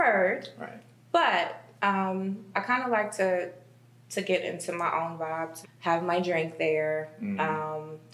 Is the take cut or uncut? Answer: cut